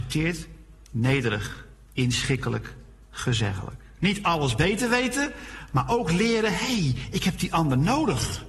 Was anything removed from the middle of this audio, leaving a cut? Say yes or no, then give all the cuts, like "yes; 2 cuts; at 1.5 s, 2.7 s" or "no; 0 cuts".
no; 0 cuts